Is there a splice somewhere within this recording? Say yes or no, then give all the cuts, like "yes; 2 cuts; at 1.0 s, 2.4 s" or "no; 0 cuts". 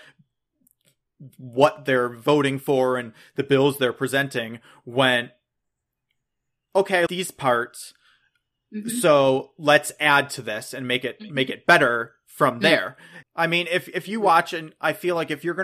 yes; 2 cuts; at 7.1 s, 13.2 s